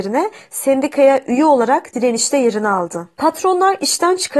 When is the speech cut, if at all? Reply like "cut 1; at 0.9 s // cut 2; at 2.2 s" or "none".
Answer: cut 1; at 3.1 s